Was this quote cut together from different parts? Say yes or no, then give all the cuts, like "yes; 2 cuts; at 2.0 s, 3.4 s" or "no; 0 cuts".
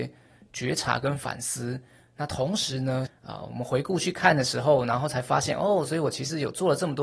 yes; 1 cut; at 3.1 s